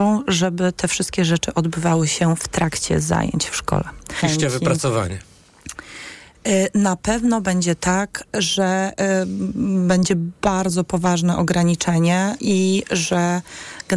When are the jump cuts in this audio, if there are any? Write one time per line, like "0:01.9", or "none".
0:04.2
0:12.4